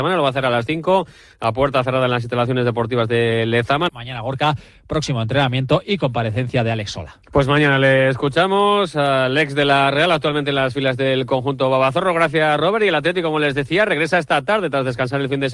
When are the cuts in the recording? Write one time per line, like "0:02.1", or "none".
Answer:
0:03.9